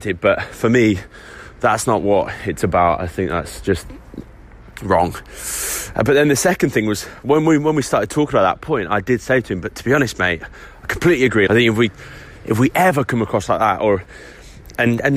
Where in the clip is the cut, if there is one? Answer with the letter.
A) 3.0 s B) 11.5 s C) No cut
B